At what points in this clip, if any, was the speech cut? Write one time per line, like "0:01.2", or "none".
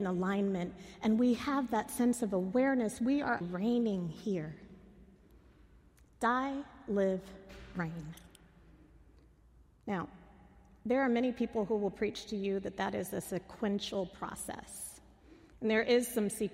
0:03.4